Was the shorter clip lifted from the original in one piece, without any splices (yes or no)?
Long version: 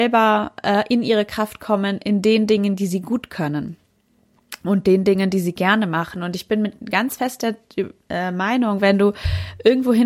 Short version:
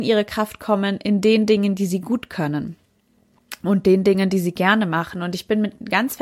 yes